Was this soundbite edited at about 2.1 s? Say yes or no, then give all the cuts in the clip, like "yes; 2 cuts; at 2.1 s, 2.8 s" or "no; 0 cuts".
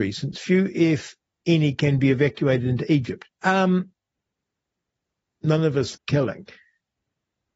no; 2 cuts; at 3.3 s, 5.9 s